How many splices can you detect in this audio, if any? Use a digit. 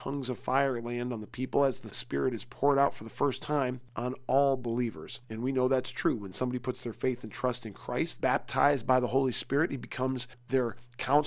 3